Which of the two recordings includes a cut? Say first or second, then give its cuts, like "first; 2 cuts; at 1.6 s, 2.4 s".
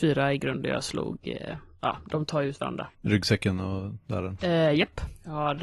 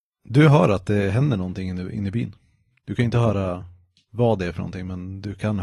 first; 2 cuts; at 2.9 s, 4.4 s